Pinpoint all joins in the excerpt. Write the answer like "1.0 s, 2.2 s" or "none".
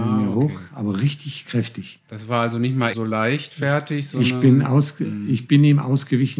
2.9 s